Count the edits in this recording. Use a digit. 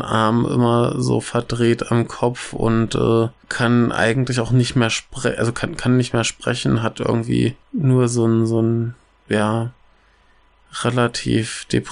1